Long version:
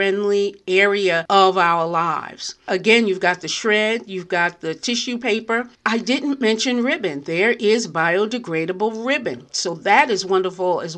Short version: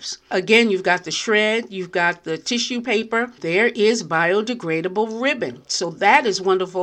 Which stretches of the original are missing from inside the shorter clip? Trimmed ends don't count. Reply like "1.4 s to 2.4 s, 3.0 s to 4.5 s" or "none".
5.7 s to 7.2 s